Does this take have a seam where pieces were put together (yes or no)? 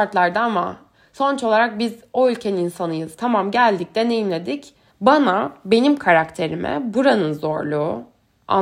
yes